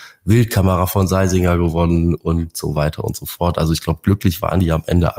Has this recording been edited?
no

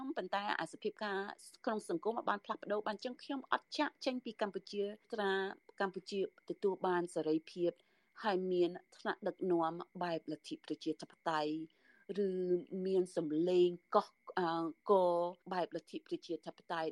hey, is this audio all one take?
no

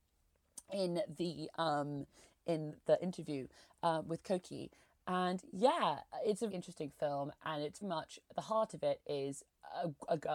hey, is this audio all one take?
no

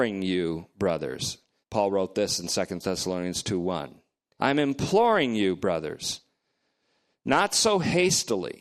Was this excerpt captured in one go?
no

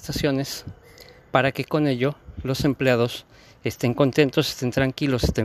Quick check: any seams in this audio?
no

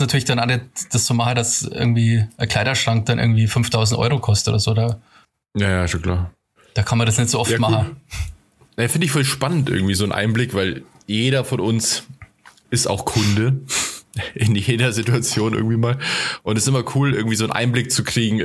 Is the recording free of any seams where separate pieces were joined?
yes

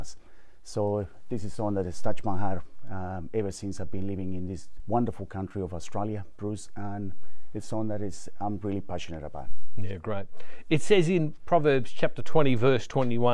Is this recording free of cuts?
no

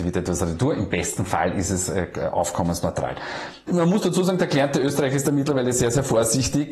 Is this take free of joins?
no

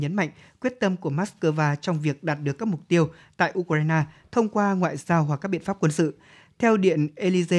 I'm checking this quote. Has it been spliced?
no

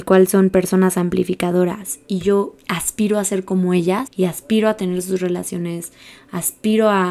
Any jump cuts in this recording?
yes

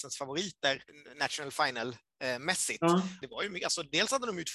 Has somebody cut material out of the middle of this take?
yes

